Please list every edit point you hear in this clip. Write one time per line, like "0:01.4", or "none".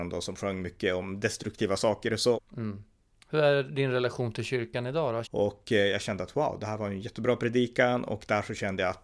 0:02.4
0:05.2